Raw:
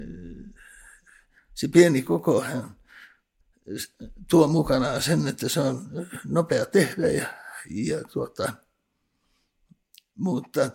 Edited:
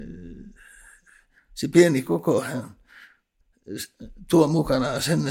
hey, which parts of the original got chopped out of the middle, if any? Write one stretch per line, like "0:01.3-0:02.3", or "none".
none